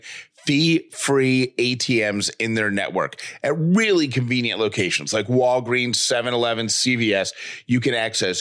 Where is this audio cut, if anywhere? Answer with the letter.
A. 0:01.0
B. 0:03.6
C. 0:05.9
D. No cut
D